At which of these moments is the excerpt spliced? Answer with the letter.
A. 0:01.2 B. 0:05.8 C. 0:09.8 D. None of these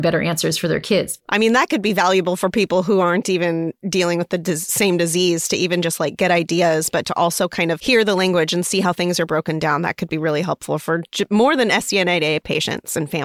A